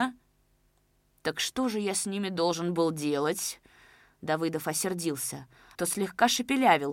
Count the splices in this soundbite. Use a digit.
1